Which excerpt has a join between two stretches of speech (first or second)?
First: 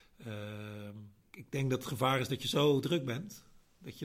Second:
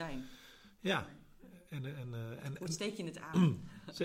first